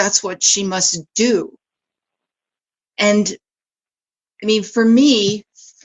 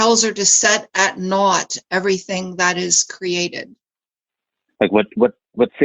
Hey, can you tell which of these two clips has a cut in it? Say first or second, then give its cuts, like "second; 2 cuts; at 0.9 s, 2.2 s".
second; 1 cut; at 4.7 s